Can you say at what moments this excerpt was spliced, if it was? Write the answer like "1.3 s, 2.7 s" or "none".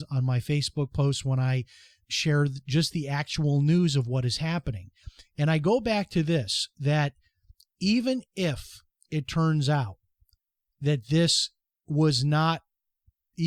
none